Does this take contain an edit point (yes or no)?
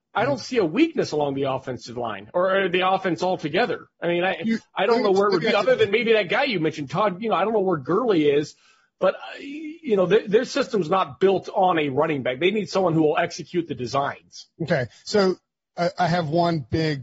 no